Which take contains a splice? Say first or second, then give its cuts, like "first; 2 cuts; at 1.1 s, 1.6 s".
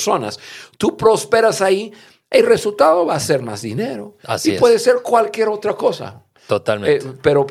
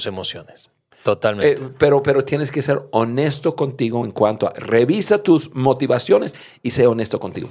second; 1 cut; at 0.9 s